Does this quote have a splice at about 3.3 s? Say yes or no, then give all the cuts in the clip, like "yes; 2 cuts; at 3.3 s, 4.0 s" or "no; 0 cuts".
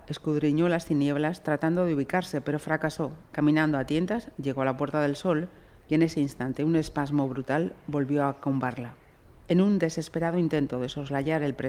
yes; 1 cut; at 3.3 s